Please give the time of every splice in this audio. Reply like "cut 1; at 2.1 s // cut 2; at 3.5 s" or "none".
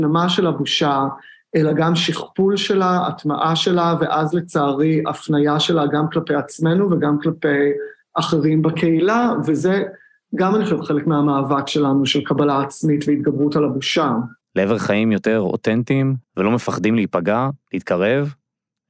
cut 1; at 14.4 s // cut 2; at 16.2 s // cut 3; at 17.6 s